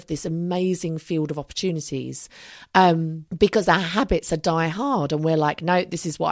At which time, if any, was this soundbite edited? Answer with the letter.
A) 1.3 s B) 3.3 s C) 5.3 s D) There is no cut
B